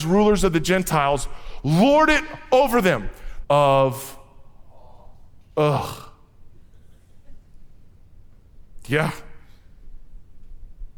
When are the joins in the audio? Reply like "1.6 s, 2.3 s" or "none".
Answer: 3.4 s